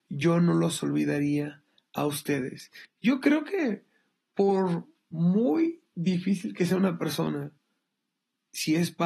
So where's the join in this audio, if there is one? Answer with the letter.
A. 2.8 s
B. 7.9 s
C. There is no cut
A